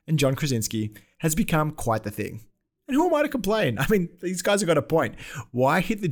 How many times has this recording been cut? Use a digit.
0